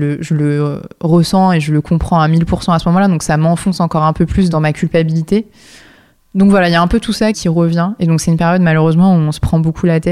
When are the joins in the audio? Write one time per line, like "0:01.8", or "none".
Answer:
0:07.3